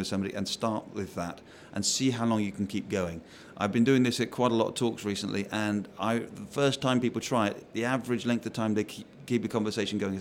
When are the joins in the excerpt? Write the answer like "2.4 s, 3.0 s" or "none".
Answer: none